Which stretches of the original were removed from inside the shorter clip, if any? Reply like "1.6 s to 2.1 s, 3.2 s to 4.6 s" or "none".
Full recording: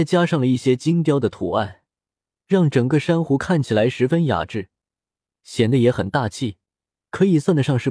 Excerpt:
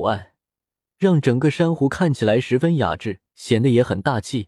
4.8 s to 5.4 s